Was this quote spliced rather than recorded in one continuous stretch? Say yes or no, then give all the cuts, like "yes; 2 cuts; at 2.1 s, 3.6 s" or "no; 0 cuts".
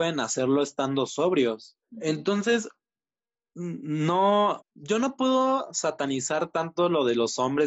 yes; 2 cuts; at 1.8 s, 4.6 s